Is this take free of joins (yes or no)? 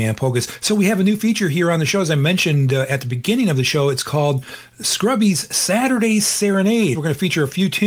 no